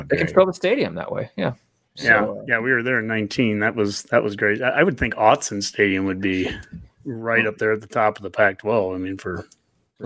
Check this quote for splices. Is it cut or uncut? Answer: uncut